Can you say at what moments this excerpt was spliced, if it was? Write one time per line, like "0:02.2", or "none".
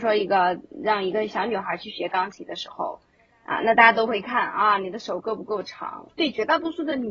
0:06.1